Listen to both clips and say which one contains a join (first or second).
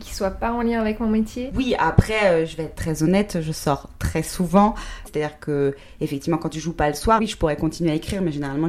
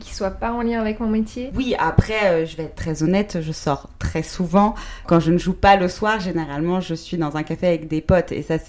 first